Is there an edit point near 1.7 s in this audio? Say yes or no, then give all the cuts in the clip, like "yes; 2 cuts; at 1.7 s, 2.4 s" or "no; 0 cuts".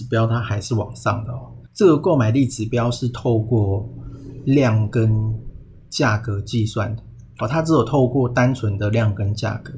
yes; 1 cut; at 1.7 s